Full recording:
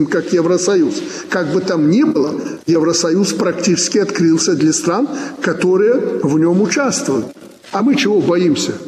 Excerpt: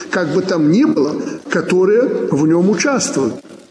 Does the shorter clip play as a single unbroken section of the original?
no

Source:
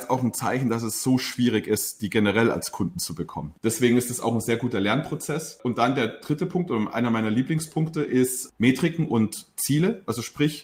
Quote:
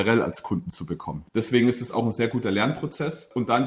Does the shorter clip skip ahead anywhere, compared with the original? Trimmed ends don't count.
no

